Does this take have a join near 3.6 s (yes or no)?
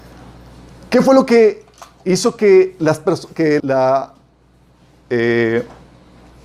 yes